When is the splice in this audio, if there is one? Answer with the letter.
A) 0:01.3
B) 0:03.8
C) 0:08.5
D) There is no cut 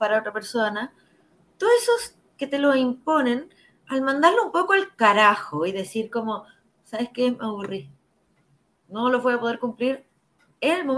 D